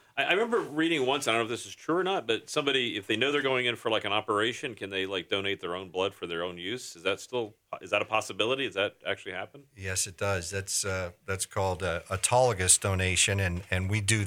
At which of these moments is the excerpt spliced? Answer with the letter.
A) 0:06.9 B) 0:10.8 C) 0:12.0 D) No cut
D